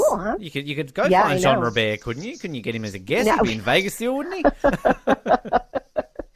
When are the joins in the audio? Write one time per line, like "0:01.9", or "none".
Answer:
none